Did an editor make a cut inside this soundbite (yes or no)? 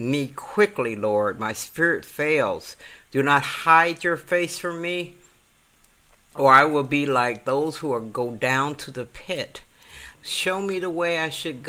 yes